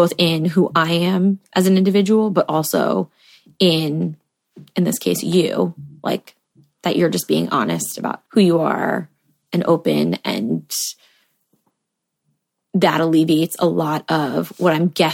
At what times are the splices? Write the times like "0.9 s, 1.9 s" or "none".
8.3 s